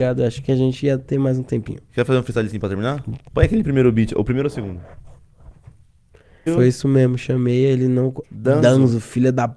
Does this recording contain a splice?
yes; 3 cuts; at 3.3 s, 6.5 s, 8.2 s

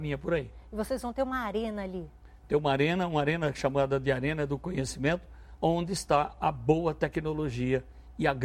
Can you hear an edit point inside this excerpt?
yes; 1 cut; at 5.6 s

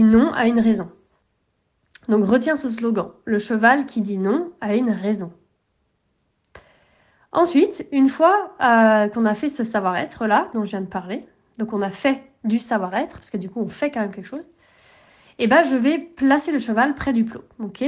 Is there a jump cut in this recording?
no; 0 cuts

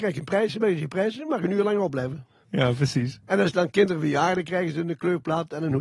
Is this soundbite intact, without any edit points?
no; 1 cut; at 2.4 s

